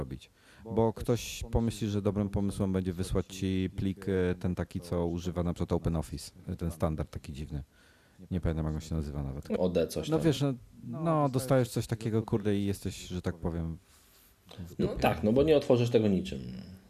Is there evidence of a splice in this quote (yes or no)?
yes